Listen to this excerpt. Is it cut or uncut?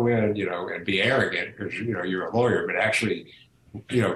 uncut